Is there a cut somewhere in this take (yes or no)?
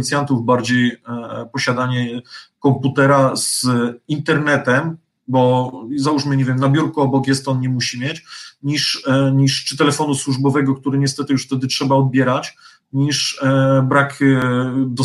no